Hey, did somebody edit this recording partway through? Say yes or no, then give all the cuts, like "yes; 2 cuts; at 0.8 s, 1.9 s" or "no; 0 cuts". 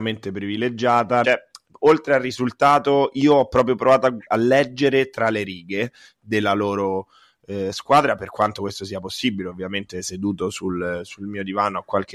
yes; 1 cut; at 1.2 s